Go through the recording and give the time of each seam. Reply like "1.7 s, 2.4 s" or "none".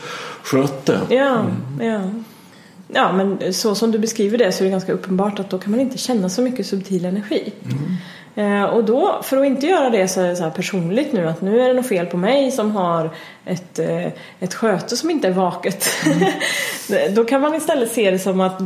none